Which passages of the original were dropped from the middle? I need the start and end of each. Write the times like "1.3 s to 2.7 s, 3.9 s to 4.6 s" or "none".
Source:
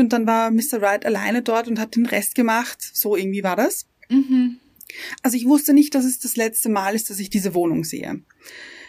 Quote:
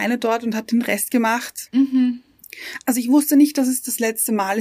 2.9 s to 4.0 s